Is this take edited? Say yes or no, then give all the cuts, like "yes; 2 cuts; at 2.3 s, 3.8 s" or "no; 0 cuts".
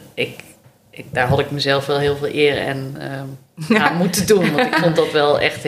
no; 0 cuts